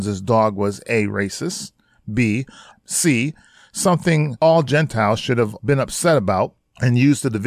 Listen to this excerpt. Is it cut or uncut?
cut